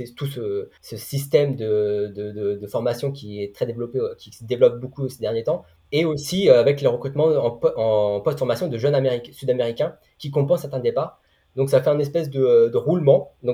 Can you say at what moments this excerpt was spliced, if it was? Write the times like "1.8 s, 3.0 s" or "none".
none